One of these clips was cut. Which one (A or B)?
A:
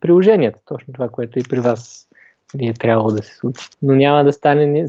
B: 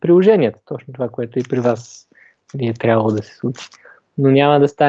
A